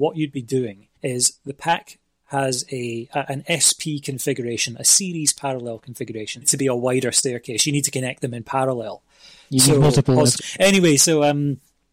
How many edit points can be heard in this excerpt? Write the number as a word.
three